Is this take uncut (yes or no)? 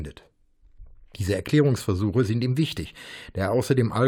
yes